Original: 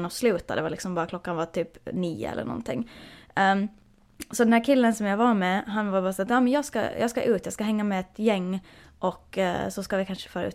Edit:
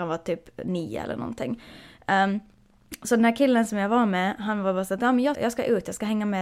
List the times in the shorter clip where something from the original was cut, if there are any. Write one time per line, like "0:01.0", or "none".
0:05.3